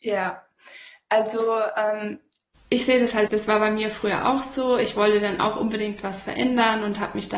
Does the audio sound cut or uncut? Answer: cut